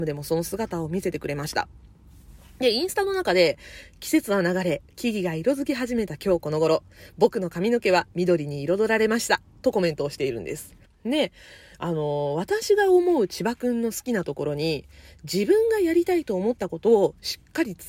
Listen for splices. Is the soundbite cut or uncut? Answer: cut